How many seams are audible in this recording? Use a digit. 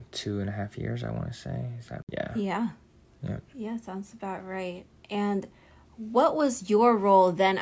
0